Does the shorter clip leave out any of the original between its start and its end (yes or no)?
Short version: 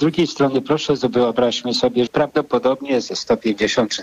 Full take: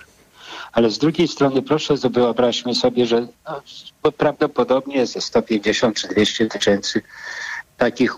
yes